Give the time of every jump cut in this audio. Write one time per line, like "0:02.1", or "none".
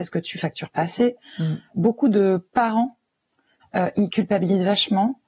0:01.7
0:03.6